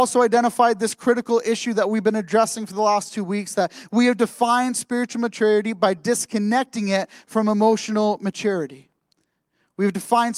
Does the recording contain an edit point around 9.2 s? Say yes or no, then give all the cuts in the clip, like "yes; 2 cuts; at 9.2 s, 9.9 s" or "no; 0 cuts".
no; 0 cuts